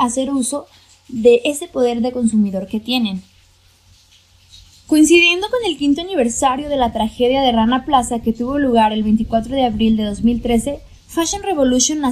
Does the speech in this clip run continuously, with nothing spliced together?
yes; 0 cuts

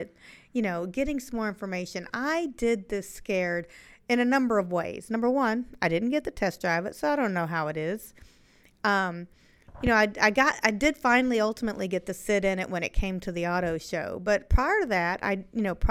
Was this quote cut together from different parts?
no; 0 cuts

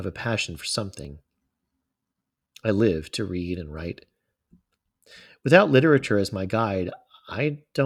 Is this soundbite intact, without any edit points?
yes; 0 cuts

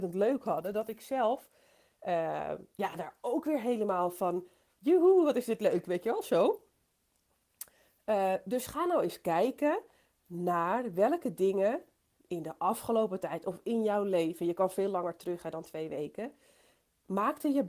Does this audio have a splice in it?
no; 0 cuts

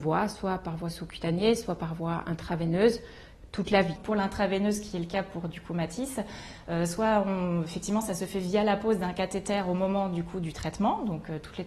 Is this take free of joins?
yes; 0 cuts

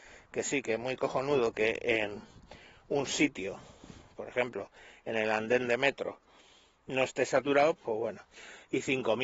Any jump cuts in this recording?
yes; 1 cut; at 7.8 s

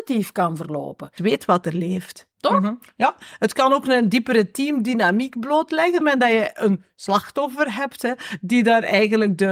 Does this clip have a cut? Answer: yes; 3 cuts; at 1.2 s, 2.3 s, 6.0 s

